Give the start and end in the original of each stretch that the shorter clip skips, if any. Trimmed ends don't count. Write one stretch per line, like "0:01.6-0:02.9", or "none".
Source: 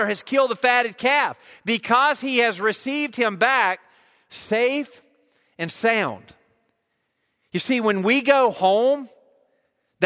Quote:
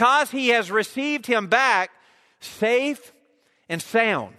none